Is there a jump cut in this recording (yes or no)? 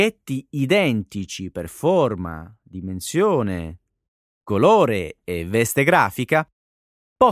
no